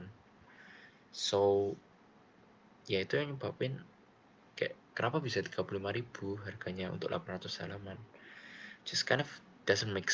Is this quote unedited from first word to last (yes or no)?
yes